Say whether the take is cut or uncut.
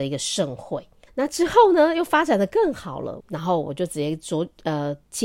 cut